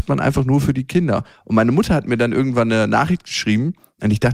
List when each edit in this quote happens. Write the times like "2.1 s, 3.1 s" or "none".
none

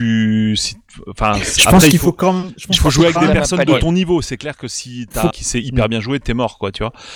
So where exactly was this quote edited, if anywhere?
5.3 s

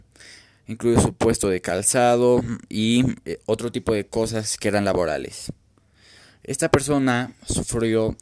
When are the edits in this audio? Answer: none

